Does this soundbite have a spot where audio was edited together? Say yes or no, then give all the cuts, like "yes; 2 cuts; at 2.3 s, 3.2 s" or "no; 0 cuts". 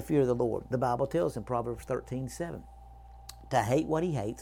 no; 0 cuts